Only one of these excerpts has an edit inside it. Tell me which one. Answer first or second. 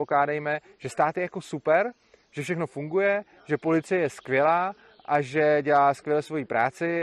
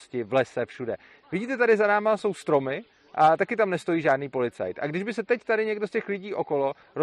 second